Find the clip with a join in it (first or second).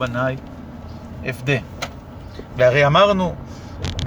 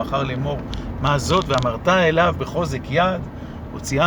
first